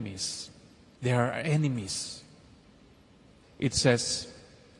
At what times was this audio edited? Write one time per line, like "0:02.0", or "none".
0:01.0
0:03.4